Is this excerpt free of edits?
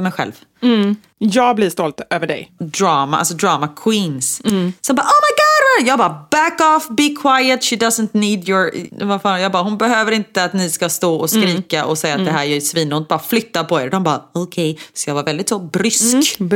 no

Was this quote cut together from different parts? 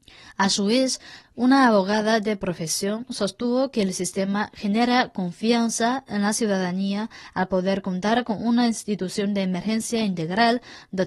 yes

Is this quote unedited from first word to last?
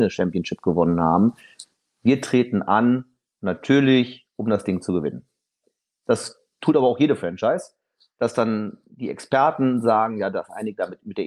yes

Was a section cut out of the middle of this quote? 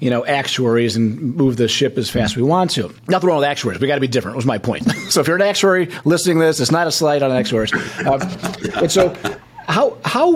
yes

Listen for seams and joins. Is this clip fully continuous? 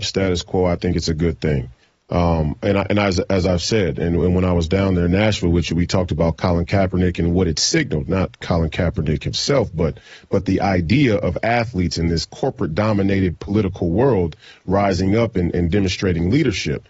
yes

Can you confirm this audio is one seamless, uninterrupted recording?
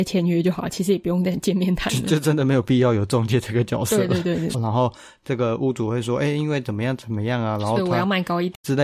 no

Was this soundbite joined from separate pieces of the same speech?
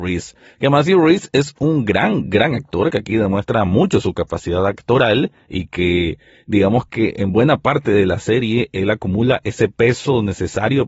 no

